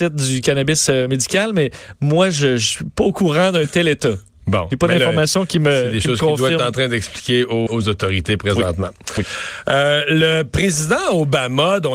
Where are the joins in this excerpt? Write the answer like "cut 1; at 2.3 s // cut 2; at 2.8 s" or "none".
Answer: cut 1; at 7.7 s

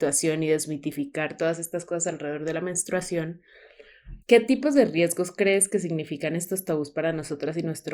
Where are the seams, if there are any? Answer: cut 1; at 4.2 s

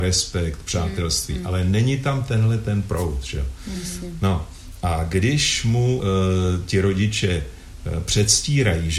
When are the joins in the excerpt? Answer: cut 1; at 6.0 s

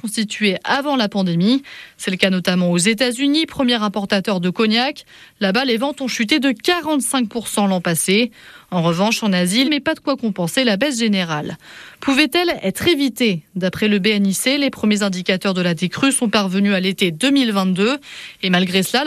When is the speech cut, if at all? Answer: cut 1; at 9.6 s

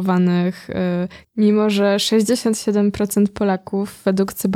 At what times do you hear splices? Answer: cut 1; at 1.2 s

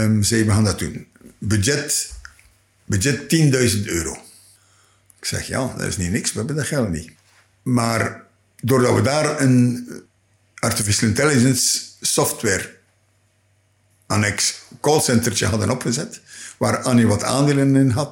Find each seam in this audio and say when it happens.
none

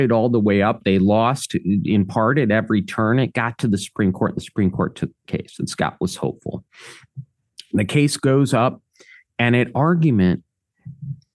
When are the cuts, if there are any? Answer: none

